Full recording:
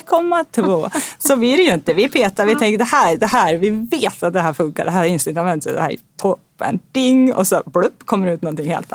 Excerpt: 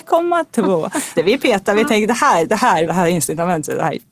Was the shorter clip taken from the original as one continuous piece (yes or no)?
no